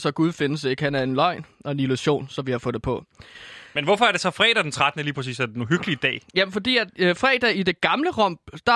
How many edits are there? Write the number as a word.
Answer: zero